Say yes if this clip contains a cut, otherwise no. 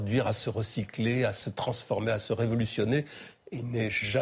no